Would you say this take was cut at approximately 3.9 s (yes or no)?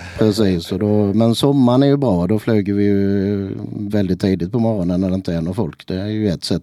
yes